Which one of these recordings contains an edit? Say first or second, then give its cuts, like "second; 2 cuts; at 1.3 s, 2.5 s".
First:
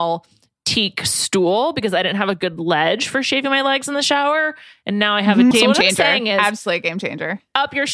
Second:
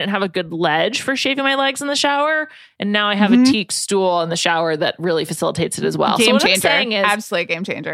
first; 1 cut; at 5.5 s